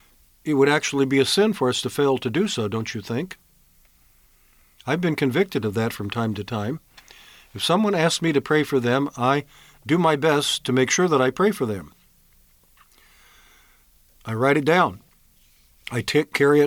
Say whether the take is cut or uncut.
uncut